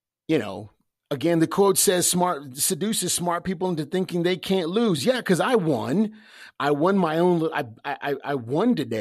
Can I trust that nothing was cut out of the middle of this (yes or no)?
yes